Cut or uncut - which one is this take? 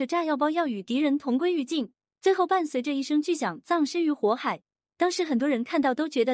uncut